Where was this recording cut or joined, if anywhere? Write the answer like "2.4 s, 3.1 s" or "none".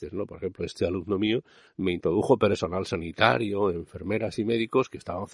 1.7 s